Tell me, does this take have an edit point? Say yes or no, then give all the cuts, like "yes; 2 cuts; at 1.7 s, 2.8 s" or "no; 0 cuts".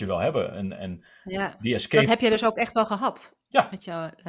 no; 0 cuts